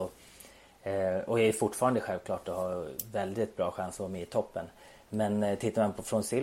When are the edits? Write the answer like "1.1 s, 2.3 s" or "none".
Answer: none